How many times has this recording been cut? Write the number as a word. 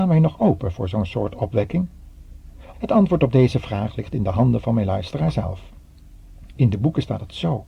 two